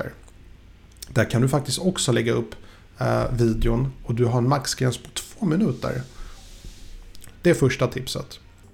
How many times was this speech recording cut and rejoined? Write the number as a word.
one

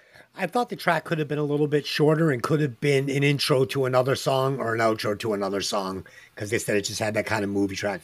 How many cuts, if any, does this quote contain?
one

